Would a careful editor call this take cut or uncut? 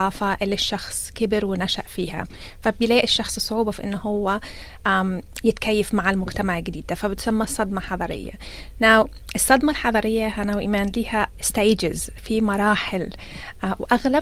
uncut